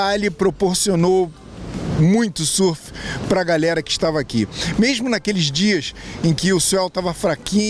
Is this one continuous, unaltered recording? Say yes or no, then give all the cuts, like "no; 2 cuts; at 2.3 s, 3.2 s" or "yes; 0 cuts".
yes; 0 cuts